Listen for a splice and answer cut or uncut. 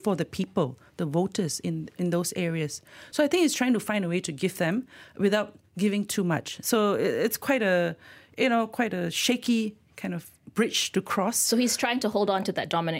uncut